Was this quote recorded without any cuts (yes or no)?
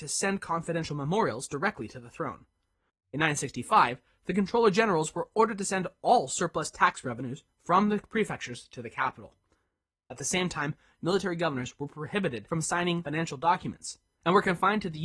no